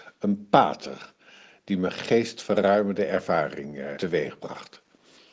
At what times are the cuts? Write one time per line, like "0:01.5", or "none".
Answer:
0:03.9